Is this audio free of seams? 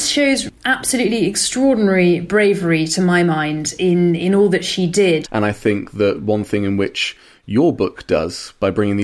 no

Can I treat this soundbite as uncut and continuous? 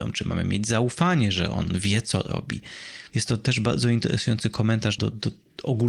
no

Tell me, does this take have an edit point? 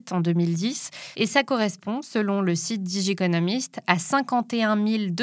yes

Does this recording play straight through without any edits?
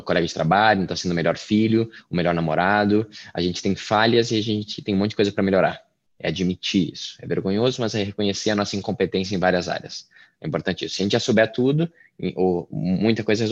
yes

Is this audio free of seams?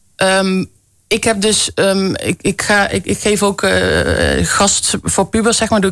yes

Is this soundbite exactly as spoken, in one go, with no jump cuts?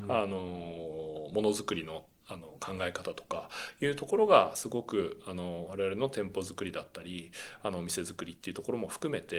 yes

